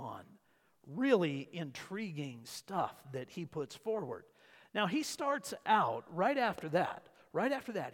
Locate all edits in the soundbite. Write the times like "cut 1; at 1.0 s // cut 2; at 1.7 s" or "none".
none